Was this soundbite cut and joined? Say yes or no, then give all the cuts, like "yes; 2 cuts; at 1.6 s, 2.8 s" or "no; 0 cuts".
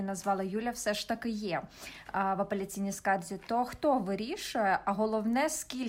no; 0 cuts